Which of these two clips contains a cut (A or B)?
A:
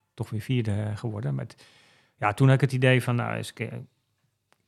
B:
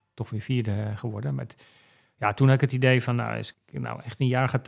B